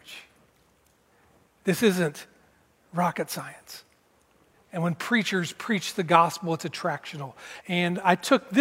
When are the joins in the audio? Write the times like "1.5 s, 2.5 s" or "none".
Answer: 4.5 s, 7.6 s